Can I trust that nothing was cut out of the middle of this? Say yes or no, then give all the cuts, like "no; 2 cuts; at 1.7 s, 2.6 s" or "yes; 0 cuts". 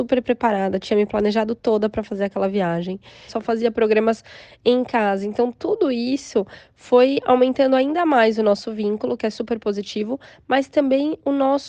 no; 1 cut; at 3.3 s